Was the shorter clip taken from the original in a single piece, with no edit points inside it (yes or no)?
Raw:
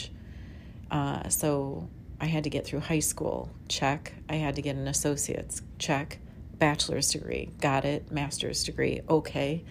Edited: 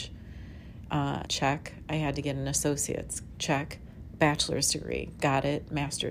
no